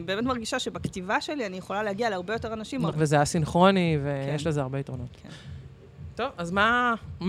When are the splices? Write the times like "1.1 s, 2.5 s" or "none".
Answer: 2.9 s